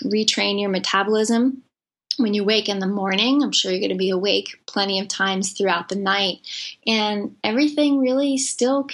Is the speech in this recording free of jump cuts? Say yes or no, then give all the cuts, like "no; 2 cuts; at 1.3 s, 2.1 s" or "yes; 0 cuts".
yes; 0 cuts